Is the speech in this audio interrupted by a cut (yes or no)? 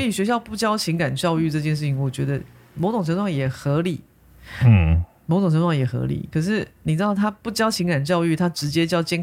no